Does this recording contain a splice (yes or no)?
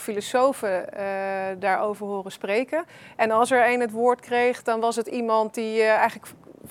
no